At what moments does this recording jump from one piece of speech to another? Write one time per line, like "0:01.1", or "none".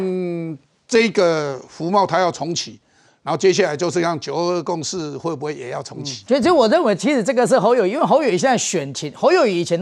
0:06.3